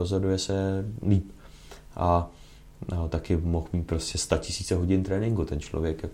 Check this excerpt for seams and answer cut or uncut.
uncut